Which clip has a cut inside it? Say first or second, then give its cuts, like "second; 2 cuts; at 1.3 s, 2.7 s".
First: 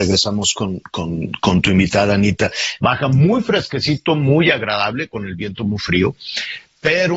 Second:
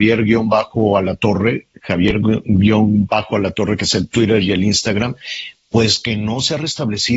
first; 1 cut; at 2.8 s